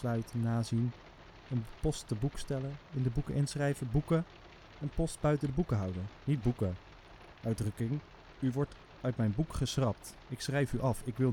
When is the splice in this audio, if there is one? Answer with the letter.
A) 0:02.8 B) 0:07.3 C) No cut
C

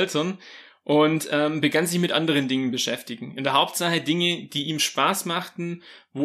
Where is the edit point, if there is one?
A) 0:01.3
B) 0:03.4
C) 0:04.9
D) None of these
D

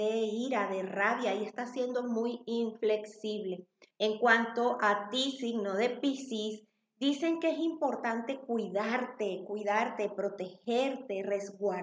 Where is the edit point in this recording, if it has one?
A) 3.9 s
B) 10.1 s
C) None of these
A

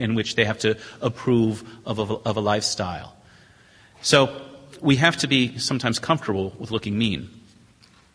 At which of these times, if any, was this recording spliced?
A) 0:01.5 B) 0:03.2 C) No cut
C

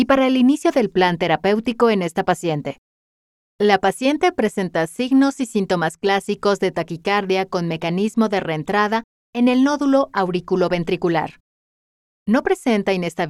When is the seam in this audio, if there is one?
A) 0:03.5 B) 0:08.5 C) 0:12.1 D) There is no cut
A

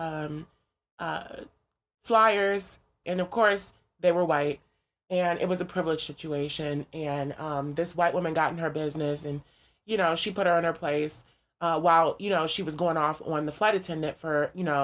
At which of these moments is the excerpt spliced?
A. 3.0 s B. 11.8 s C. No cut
A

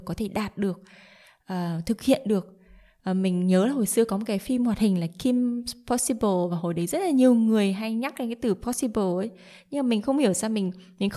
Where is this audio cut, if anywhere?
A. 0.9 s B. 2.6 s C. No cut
C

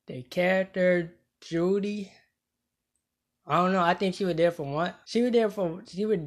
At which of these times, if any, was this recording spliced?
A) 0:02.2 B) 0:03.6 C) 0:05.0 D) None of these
C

